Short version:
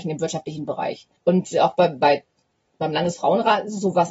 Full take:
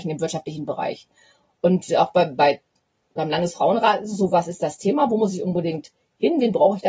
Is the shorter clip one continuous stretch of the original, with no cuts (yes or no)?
no